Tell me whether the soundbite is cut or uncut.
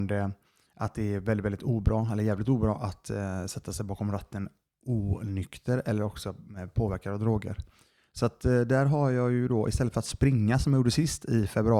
uncut